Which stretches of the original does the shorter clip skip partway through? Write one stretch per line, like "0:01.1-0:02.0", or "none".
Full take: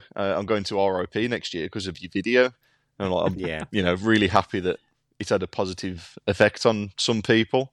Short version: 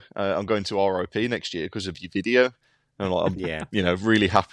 none